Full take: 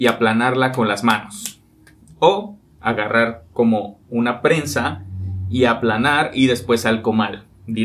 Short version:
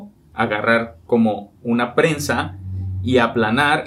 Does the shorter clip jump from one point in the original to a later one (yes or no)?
no